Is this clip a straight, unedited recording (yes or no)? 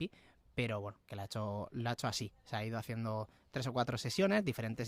yes